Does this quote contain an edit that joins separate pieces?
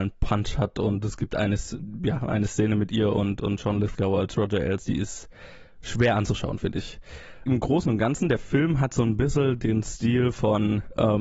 no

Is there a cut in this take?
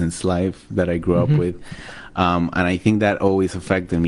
no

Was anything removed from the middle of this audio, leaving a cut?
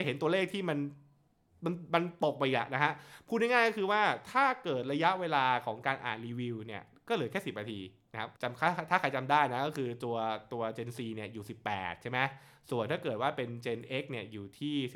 yes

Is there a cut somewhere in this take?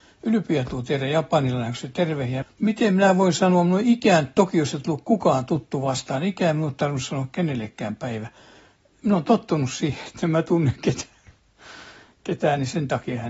yes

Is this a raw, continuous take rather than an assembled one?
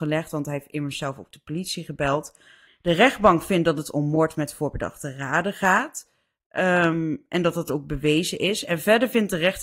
no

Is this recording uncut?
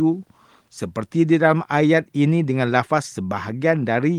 yes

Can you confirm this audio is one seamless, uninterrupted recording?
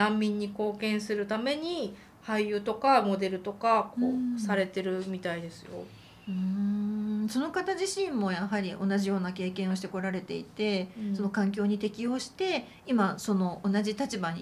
yes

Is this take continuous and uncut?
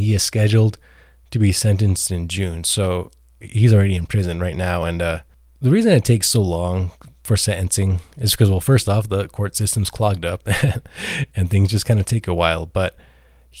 yes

